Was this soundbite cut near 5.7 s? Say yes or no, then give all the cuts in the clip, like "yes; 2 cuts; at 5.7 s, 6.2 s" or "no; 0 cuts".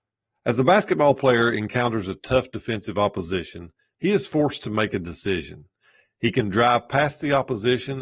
no; 0 cuts